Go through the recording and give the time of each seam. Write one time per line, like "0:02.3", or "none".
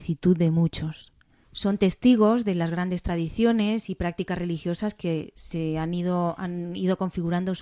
0:01.4